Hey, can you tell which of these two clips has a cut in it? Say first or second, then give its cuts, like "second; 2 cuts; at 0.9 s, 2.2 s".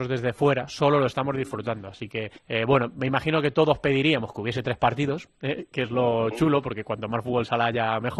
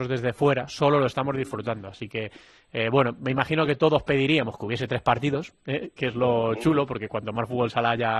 first; 1 cut; at 2.4 s